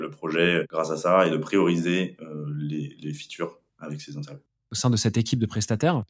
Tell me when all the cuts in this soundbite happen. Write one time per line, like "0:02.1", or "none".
0:03.7